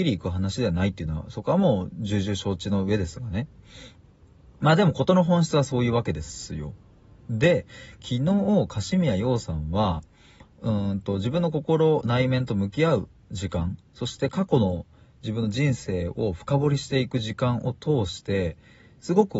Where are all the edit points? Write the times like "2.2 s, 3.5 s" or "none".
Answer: none